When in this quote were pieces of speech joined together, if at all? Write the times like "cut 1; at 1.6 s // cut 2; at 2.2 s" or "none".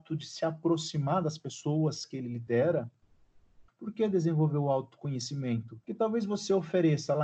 cut 1; at 3.7 s // cut 2; at 5.8 s